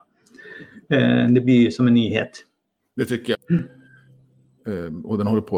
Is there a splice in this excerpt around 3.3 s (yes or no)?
yes